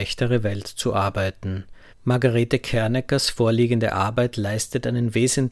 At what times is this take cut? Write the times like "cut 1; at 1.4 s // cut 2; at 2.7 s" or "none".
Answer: cut 1; at 1.9 s